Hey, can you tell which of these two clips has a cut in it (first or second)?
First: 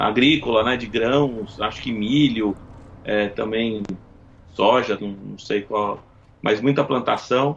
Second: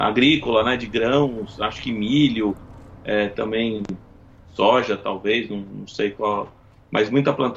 first